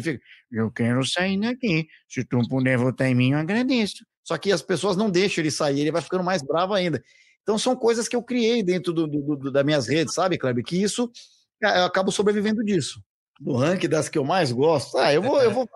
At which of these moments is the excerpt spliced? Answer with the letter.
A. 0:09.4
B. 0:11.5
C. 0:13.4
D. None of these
C